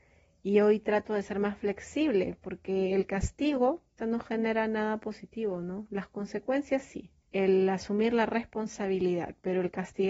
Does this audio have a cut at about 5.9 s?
no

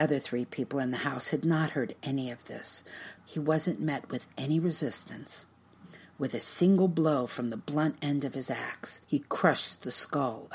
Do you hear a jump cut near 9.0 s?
yes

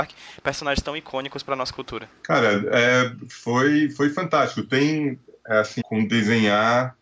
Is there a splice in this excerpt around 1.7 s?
no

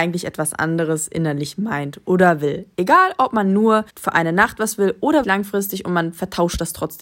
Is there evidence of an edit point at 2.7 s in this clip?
no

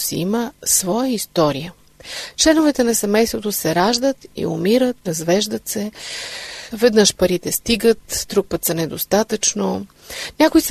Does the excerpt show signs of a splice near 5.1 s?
yes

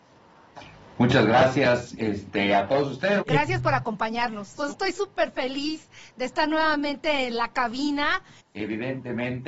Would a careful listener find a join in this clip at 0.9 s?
no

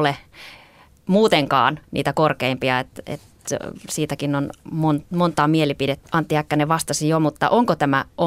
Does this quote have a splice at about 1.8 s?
yes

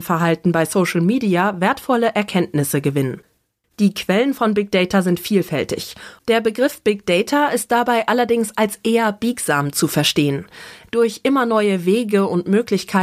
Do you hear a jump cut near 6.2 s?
yes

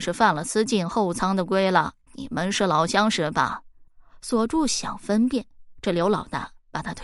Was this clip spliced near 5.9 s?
no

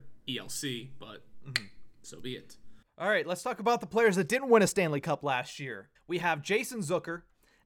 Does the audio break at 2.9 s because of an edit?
yes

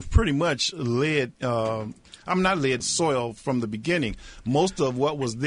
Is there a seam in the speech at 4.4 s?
no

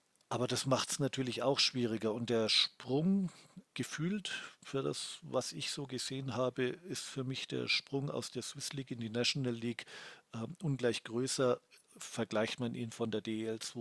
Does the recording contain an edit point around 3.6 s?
yes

